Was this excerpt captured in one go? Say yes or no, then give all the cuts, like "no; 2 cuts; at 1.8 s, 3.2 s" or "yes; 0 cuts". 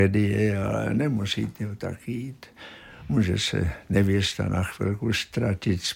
yes; 0 cuts